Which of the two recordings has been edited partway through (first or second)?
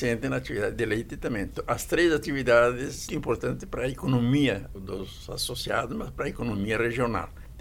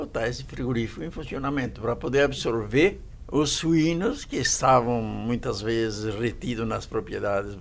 first